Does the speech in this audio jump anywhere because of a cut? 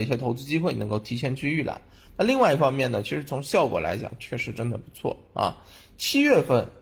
no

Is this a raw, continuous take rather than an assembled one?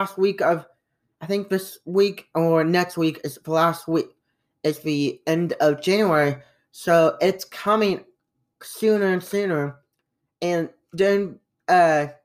yes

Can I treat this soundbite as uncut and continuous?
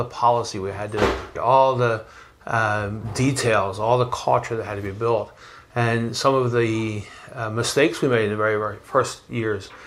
no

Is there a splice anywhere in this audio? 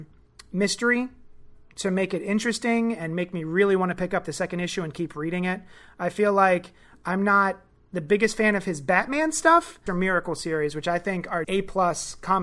yes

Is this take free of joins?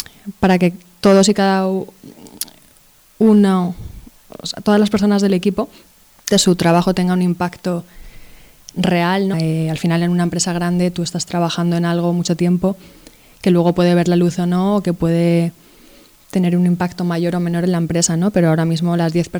no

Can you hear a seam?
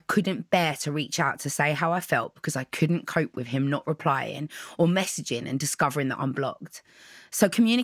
no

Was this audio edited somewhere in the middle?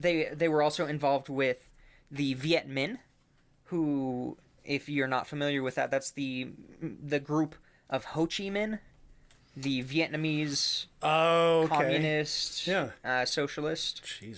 no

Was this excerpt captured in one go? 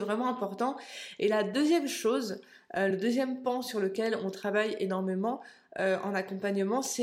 yes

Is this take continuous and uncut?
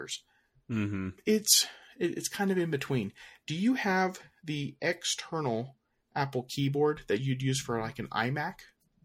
no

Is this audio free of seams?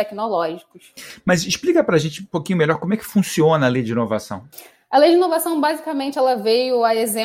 yes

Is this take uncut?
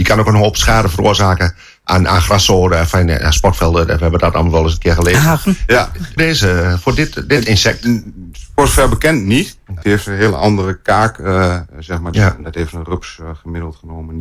no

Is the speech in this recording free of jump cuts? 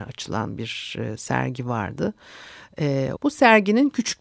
no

